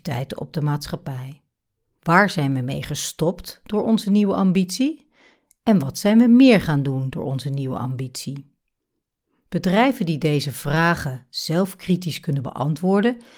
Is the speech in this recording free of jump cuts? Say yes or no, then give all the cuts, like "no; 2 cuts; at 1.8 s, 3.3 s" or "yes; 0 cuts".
no; 1 cut; at 2.0 s